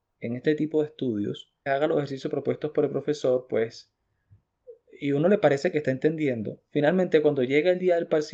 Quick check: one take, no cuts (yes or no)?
no